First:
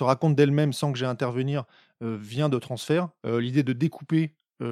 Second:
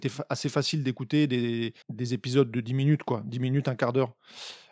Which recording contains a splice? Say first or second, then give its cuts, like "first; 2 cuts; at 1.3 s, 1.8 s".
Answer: second; 1 cut; at 1.8 s